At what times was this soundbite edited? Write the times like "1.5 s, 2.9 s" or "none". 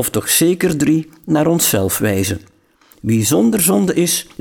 2.9 s